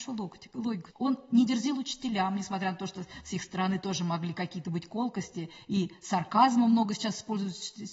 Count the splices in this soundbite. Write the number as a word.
one